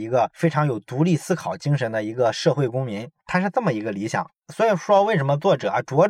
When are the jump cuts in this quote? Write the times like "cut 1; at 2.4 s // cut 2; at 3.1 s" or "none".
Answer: cut 1; at 4.4 s

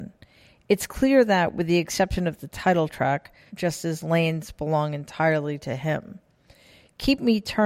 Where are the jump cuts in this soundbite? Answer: cut 1; at 3.5 s

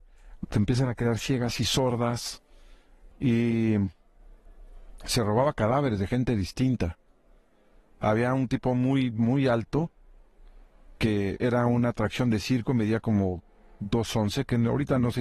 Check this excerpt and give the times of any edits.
cut 1; at 3.1 s

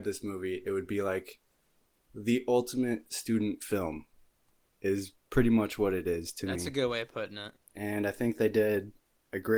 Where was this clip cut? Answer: none

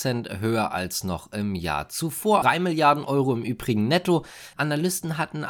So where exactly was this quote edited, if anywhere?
cut 1; at 2.4 s // cut 2; at 4.5 s

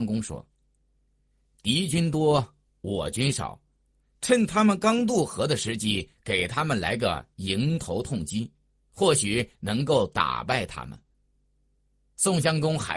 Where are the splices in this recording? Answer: none

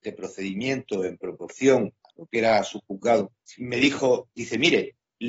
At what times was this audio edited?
cut 1; at 3.6 s

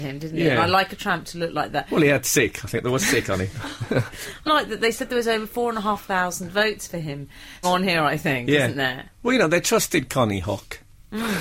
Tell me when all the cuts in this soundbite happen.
cut 1; at 4.5 s // cut 2; at 7.6 s

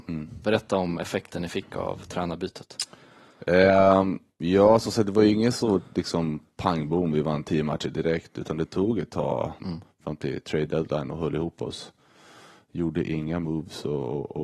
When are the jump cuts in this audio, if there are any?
cut 1; at 9.6 s

